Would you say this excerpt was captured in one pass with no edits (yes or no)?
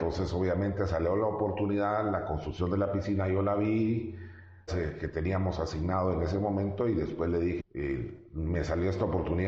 no